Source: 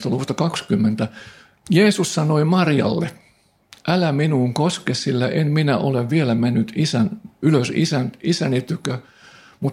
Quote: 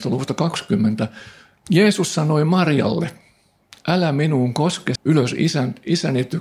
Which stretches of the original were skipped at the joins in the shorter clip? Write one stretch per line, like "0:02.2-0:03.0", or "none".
0:05.0-0:07.3